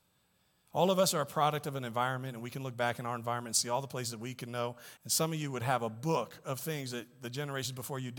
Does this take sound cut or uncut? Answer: cut